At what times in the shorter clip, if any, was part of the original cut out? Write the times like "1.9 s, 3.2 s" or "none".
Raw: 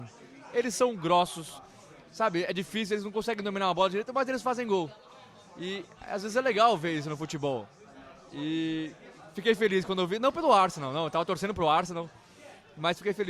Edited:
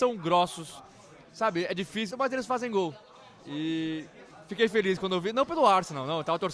2.1 s, 3.4 s